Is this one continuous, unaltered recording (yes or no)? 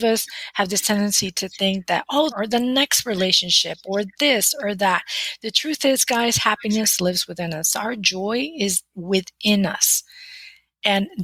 no